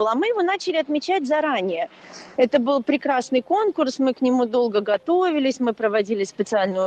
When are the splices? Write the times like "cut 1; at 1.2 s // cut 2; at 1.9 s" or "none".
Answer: cut 1; at 2.4 s